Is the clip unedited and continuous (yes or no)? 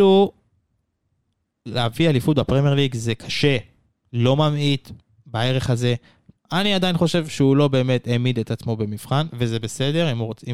no